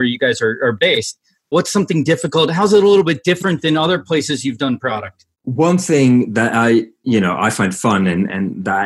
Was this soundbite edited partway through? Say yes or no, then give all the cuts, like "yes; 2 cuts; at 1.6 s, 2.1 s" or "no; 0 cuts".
yes; 2 cuts; at 1.5 s, 5.3 s